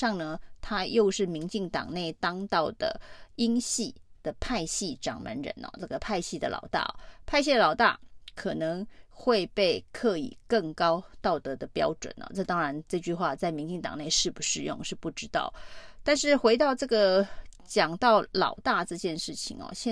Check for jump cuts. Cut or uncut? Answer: uncut